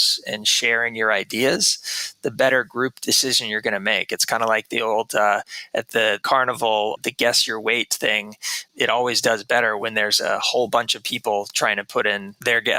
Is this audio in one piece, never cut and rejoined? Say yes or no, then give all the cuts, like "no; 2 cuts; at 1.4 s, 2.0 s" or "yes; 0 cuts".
yes; 0 cuts